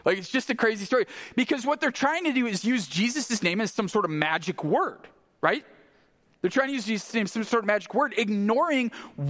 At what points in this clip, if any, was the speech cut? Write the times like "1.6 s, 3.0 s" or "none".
none